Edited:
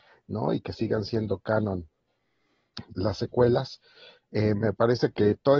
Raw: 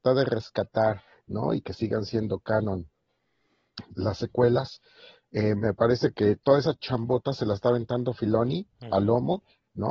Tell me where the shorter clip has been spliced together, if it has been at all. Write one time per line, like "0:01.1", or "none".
none

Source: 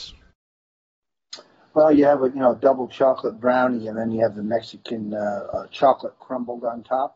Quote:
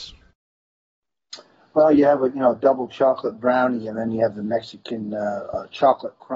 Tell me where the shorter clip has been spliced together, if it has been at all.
none

